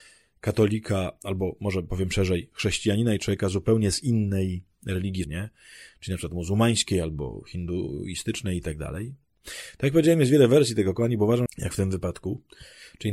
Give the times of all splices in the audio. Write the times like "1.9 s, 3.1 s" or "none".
5.2 s, 9.3 s, 11.5 s